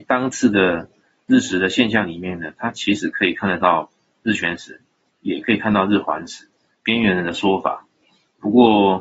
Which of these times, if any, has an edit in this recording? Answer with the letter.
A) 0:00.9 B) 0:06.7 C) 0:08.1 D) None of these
B